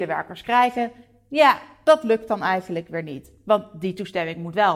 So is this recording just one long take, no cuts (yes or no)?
yes